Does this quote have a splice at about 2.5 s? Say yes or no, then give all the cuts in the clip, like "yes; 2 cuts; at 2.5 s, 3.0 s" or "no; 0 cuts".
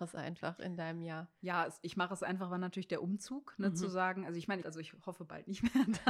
no; 1 cut; at 4.6 s